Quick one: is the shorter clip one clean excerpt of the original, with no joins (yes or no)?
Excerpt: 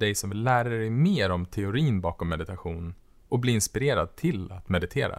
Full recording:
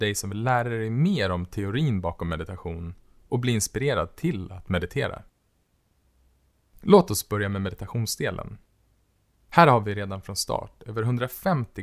yes